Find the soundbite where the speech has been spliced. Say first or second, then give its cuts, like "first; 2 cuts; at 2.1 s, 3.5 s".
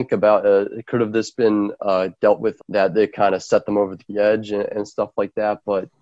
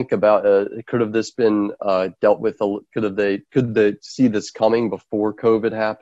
first; 1 cut; at 2.6 s